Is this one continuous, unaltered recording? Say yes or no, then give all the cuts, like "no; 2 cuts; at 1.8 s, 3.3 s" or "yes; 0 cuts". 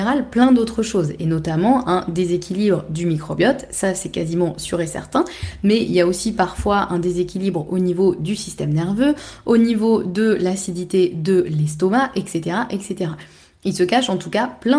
yes; 0 cuts